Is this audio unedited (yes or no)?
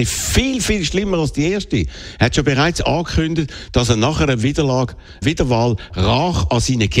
no